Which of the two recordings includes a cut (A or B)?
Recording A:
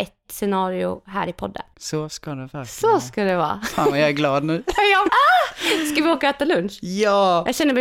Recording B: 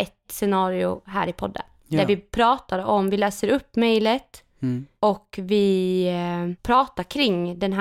A